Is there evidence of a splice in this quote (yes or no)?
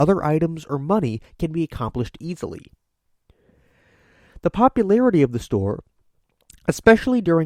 no